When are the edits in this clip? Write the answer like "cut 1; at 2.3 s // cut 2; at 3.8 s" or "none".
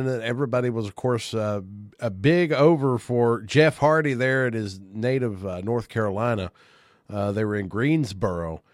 none